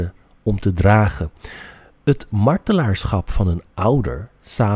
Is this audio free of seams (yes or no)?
yes